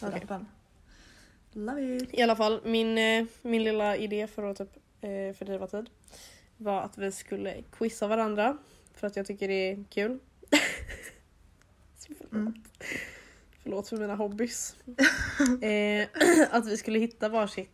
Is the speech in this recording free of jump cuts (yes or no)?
yes